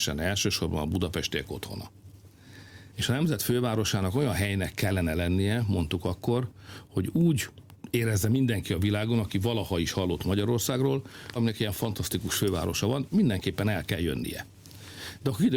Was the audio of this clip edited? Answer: yes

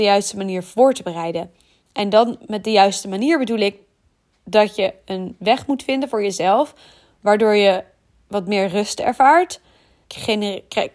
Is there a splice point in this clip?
yes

